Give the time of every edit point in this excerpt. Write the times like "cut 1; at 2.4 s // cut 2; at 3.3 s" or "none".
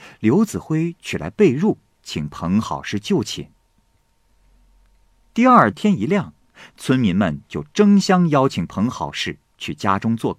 cut 1; at 5.7 s